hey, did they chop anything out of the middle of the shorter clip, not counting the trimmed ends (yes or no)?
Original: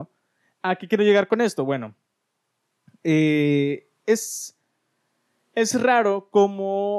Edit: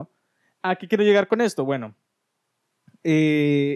no